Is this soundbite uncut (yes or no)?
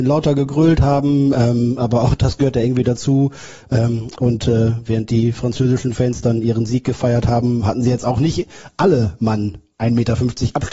yes